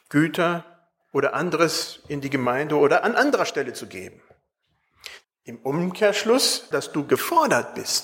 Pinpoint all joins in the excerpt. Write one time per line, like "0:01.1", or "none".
0:05.2
0:06.7